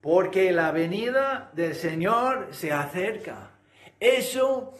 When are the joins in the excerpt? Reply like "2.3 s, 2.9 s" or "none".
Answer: none